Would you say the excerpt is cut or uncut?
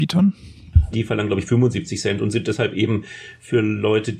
cut